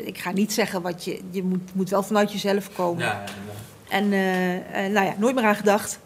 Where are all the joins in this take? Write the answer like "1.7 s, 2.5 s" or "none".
none